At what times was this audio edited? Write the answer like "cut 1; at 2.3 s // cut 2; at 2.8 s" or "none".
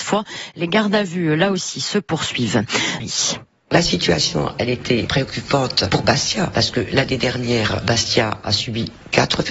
cut 1; at 3.0 s